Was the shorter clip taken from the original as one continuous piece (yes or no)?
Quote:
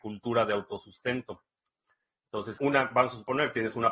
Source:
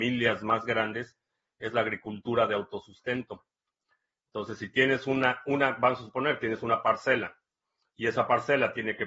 no